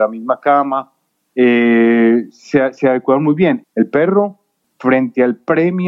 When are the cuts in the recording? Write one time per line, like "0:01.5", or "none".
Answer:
0:02.3
0:03.6